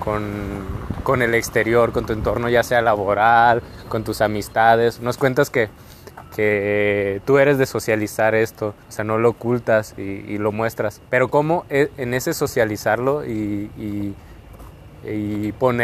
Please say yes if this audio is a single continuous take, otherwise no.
no